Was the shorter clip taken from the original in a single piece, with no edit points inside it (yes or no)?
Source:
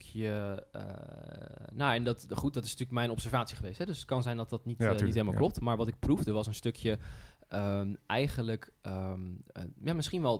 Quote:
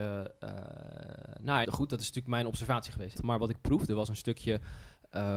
no